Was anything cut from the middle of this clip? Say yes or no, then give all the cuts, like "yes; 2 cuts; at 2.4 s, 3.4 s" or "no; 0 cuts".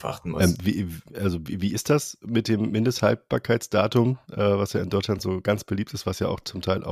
no; 0 cuts